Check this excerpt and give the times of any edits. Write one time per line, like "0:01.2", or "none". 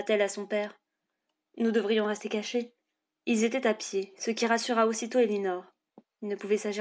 0:03.1